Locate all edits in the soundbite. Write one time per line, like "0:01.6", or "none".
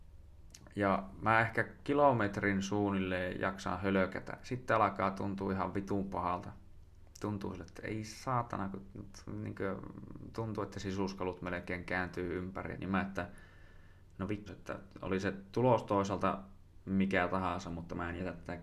0:12.8
0:14.5